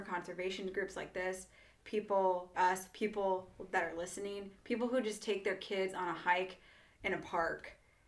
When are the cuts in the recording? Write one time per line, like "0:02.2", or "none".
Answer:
0:02.5